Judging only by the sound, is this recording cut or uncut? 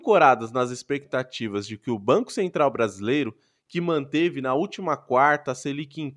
uncut